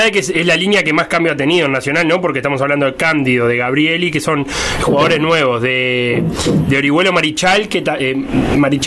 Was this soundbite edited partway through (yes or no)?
no